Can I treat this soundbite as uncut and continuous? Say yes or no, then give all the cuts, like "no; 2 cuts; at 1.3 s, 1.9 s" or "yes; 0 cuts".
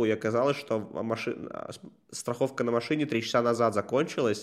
yes; 0 cuts